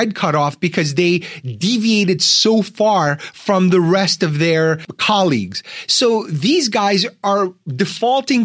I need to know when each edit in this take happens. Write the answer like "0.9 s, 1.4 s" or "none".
none